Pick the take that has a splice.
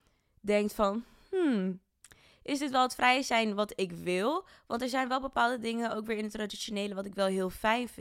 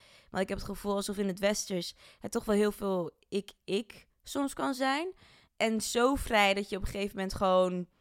second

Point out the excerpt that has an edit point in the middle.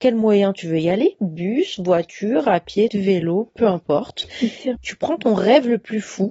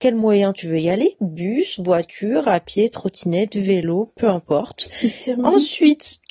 first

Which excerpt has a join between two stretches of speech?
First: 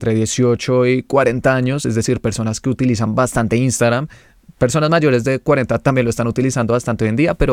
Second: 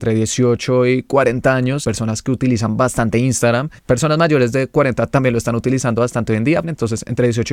second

